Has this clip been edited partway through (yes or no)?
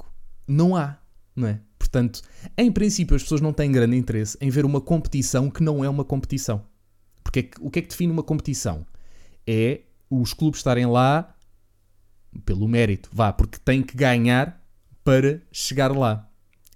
no